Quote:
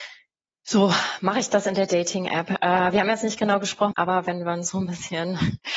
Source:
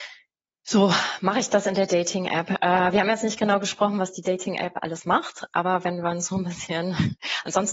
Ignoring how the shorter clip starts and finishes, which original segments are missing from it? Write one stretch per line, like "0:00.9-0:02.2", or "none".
0:03.9-0:05.5